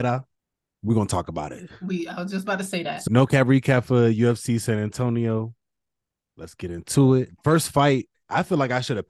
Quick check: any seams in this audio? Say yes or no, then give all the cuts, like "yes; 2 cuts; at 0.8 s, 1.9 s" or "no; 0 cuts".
no; 0 cuts